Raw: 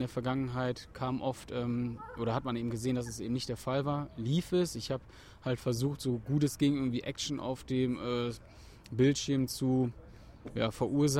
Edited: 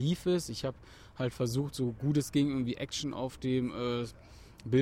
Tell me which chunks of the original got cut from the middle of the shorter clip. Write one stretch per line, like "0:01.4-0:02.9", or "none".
none